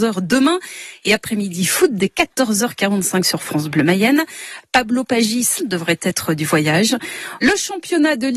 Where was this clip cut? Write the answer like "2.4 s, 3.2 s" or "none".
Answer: 5.6 s, 7.4 s